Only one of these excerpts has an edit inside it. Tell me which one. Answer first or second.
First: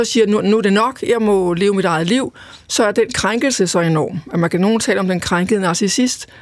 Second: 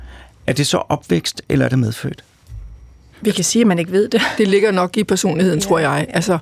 second